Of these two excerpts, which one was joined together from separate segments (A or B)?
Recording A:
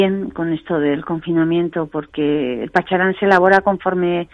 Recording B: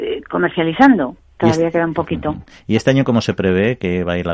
B